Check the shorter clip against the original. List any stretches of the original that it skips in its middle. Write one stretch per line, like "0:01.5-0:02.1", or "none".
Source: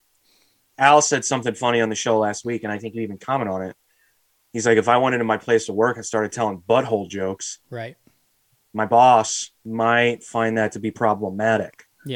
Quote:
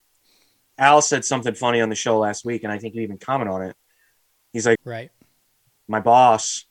0:04.8-0:07.6